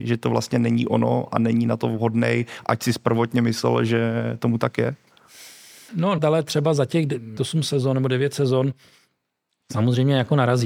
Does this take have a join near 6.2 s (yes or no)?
yes